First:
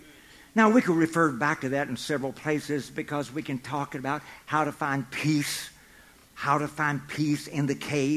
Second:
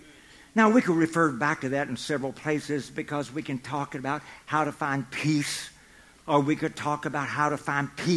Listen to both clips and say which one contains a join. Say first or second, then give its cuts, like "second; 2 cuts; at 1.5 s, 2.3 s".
second; 1 cut; at 6.2 s